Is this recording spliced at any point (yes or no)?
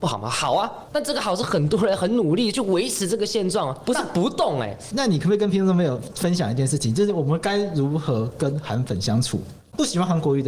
no